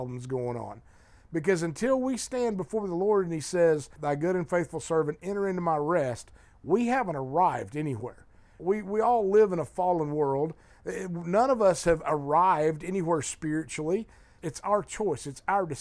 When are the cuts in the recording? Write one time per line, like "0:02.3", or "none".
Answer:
0:04.0
0:08.6
0:14.4